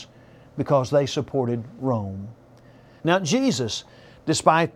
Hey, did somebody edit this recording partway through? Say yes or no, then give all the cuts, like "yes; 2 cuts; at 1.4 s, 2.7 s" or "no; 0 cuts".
yes; 1 cut; at 3.0 s